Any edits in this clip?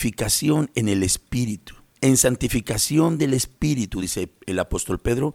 no; 0 cuts

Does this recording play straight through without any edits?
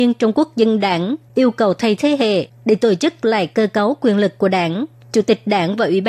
no; 1 cut; at 2.0 s

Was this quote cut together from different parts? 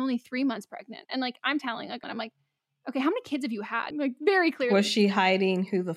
yes; 2 cuts; at 2.0 s, 3.9 s

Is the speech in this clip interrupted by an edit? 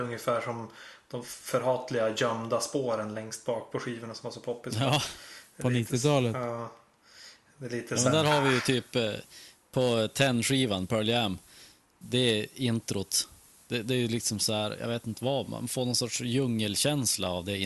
no; 0 cuts

